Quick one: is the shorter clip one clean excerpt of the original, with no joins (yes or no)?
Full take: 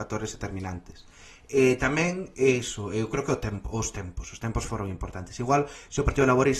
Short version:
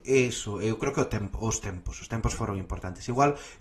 yes